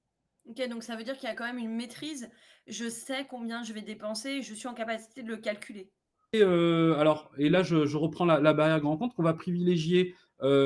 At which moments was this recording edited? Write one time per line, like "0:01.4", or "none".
0:06.3

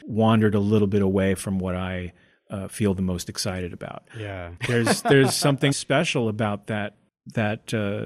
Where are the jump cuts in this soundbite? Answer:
0:04.6
0:05.7

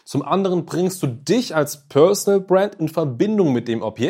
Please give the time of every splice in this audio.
none

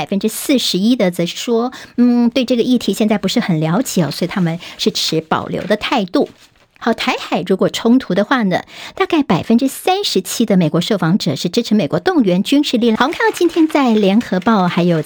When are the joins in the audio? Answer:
0:06.8
0:13.0

